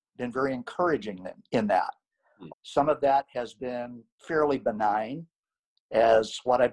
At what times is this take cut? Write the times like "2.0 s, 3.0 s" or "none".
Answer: 2.5 s, 4.1 s, 5.7 s

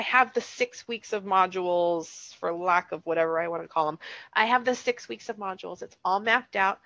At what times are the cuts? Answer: none

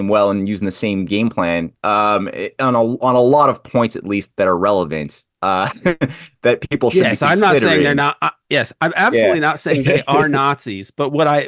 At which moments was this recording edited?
none

